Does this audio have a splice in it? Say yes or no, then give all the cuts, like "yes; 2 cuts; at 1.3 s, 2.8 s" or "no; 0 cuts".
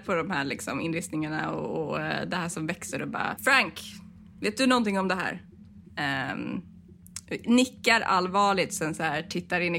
yes; 2 cuts; at 3.4 s, 5.8 s